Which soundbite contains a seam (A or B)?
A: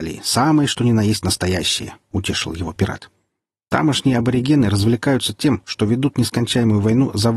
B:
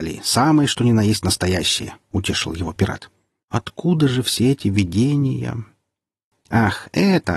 B